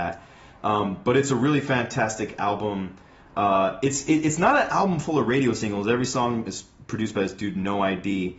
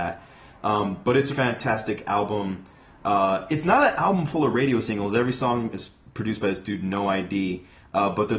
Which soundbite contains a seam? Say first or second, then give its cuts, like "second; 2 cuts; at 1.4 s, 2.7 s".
second; 2 cuts; at 1.3 s, 3.5 s